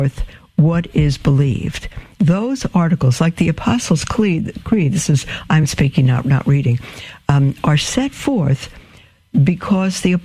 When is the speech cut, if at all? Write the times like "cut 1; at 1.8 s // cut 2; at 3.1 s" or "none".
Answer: cut 1; at 2.2 s